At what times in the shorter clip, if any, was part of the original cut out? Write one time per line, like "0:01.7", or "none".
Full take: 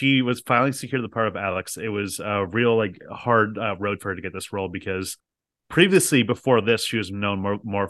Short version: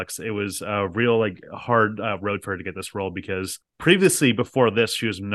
0:03.7